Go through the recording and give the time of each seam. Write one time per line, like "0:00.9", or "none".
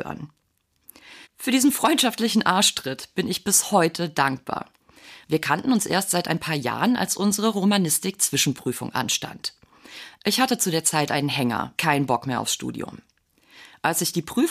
0:01.2
0:05.2
0:11.8